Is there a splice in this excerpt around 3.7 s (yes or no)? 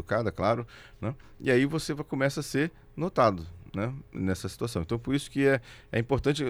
no